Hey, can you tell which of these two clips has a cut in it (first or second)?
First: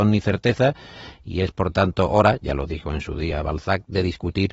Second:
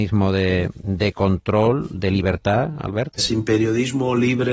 second